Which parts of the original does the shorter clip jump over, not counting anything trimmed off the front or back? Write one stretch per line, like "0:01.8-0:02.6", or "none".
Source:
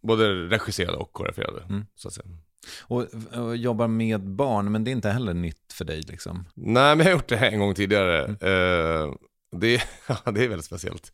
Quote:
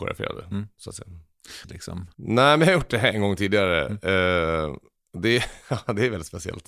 0:02.8-0:06.0